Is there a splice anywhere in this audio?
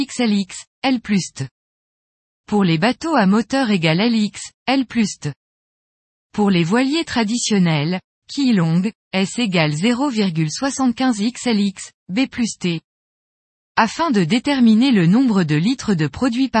no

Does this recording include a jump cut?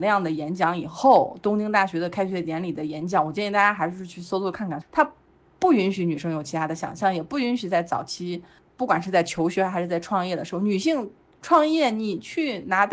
yes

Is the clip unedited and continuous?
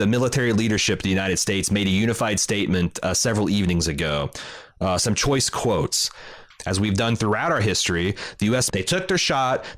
no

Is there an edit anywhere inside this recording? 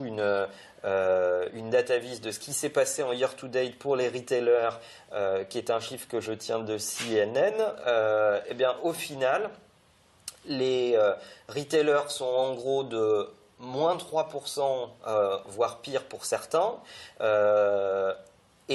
yes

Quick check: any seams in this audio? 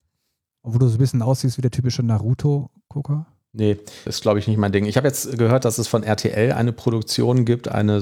yes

